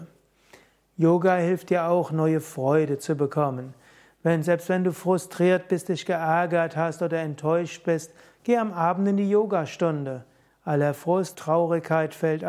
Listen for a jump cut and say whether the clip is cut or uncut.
cut